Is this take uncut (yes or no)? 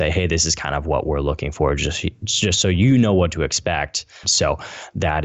no